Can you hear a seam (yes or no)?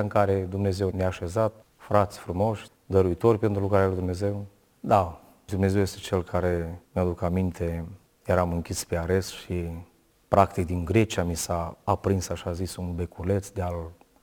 yes